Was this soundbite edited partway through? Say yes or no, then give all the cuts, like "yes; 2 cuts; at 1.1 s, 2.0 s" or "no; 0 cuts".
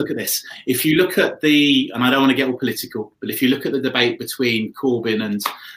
no; 0 cuts